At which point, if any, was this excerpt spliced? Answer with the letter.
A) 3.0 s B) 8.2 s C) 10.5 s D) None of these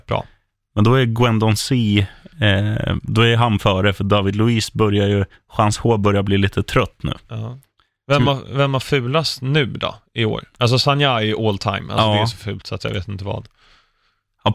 D